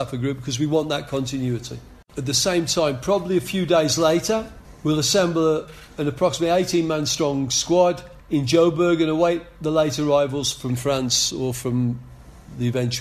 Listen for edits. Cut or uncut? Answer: uncut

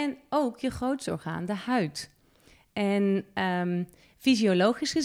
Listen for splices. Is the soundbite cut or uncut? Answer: uncut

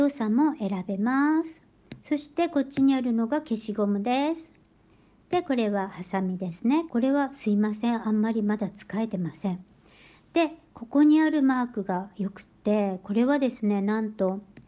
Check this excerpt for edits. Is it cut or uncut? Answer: cut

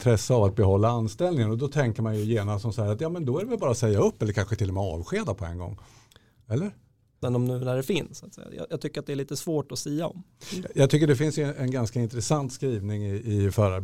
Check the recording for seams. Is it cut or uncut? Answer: cut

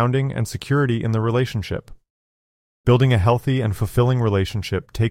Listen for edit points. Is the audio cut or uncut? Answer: cut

